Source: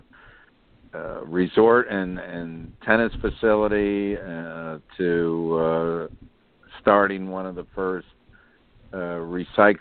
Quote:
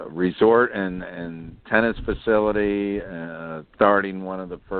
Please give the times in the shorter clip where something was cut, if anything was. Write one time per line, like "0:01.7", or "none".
0:03.7